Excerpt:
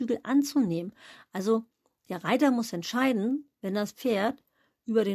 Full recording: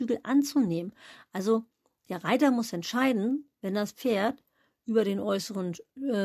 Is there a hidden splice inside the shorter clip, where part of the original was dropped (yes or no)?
no